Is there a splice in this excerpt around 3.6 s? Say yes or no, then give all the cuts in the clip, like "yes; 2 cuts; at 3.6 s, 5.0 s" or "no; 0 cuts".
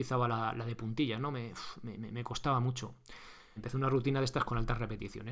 yes; 1 cut; at 3.6 s